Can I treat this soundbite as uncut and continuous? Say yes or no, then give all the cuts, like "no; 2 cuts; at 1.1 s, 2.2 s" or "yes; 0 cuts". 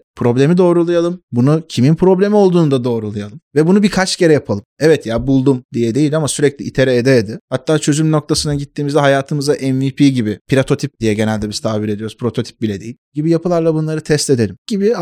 yes; 0 cuts